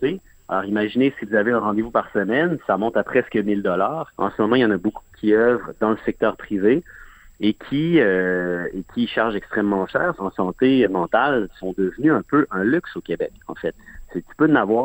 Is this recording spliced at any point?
yes; 2 cuts; at 4.2 s, 10.2 s

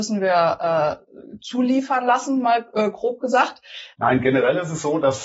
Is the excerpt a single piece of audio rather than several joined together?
no; 1 cut; at 3.9 s

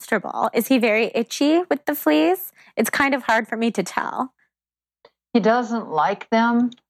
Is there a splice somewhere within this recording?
no; 0 cuts

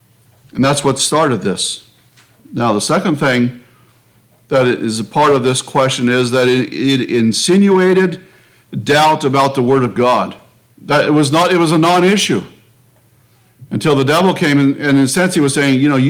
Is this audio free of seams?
no; 1 cut; at 10.7 s

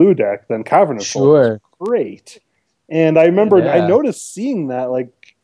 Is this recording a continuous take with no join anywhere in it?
yes; 0 cuts

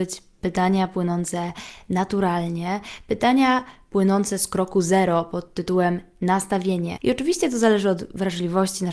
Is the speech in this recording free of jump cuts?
no; 1 cut; at 7.0 s

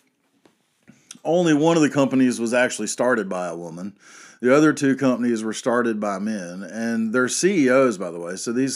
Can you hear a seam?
no; 0 cuts

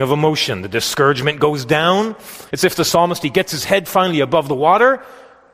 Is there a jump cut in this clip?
yes; 1 cut; at 2.5 s

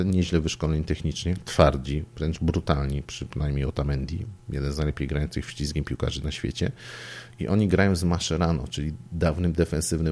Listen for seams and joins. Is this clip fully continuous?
yes; 0 cuts

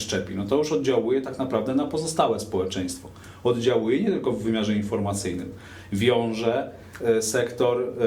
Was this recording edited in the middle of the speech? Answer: no; 0 cuts

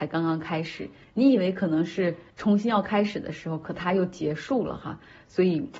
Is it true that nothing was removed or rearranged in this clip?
no; 1 cut; at 2.3 s

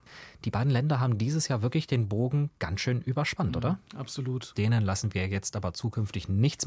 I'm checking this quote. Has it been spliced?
yes; 1 cut; at 4.5 s

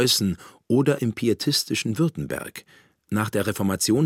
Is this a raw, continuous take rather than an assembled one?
yes; 0 cuts

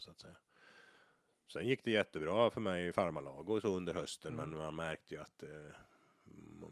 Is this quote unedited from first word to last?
yes; 0 cuts

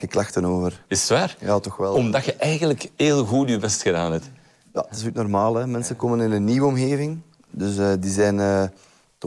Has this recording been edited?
no; 0 cuts

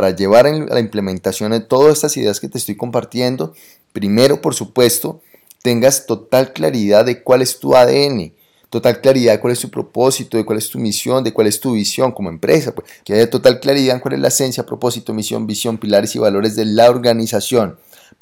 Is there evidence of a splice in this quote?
yes; 1 cut; at 13.0 s

